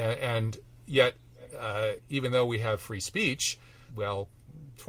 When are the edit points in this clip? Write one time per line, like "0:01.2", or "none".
0:03.9